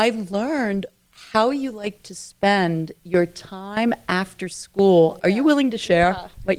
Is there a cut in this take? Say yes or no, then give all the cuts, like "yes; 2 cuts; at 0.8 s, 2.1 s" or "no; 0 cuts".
yes; 1 cut; at 5.2 s